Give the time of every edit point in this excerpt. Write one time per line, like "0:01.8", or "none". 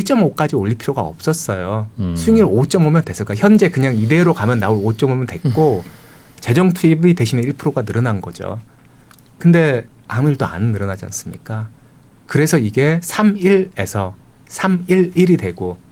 none